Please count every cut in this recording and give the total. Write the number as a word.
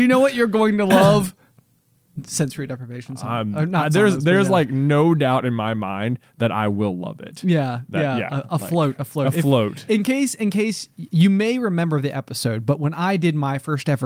zero